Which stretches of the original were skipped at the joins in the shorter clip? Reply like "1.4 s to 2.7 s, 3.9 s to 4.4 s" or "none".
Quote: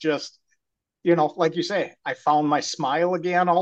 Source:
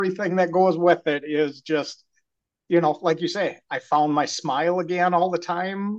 none